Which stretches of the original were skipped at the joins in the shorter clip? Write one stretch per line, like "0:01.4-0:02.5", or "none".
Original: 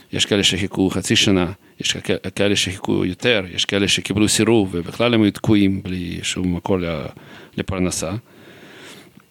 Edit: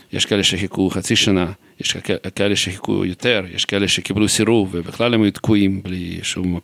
none